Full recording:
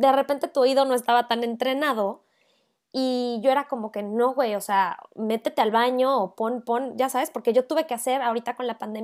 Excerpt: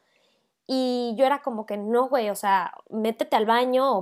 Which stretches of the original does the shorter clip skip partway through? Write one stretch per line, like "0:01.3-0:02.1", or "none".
none